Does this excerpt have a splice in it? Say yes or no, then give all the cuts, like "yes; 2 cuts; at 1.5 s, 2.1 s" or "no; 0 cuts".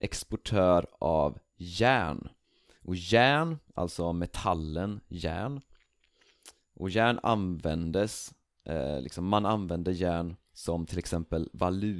yes; 1 cut; at 10.5 s